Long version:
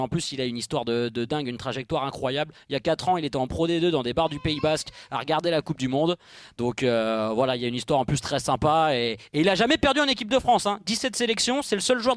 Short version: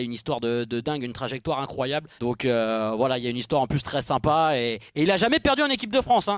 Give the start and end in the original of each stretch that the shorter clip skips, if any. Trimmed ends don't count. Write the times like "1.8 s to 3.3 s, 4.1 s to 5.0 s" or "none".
2.6 s to 6.5 s